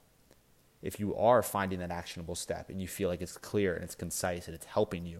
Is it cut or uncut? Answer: uncut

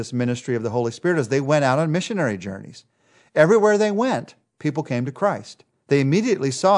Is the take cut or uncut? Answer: cut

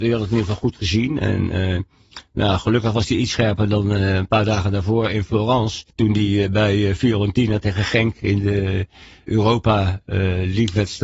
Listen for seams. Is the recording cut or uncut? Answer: cut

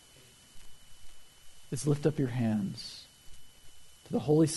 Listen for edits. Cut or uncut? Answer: uncut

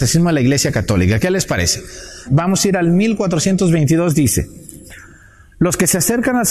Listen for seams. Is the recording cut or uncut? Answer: cut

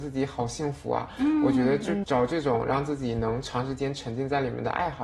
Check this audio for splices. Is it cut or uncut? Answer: cut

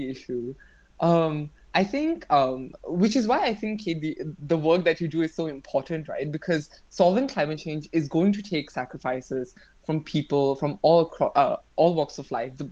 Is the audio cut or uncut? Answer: uncut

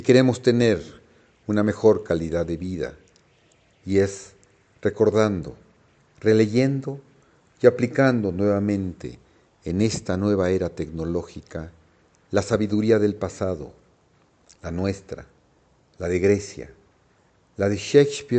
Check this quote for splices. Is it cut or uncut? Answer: uncut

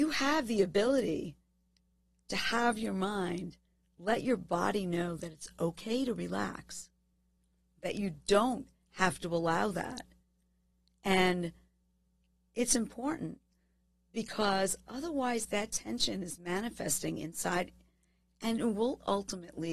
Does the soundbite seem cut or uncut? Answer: uncut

